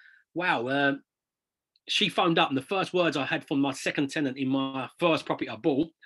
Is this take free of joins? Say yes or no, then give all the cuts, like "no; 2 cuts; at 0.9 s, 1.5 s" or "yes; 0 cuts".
yes; 0 cuts